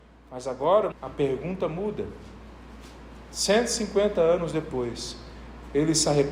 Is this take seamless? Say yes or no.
no